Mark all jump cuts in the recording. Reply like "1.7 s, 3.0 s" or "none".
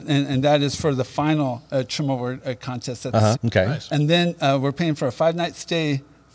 3.3 s